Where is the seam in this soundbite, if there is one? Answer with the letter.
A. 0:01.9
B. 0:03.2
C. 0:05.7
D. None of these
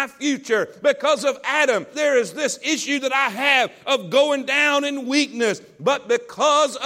A